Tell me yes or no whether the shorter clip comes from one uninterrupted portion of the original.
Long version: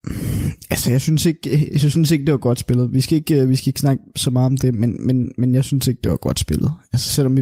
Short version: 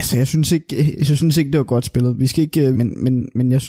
no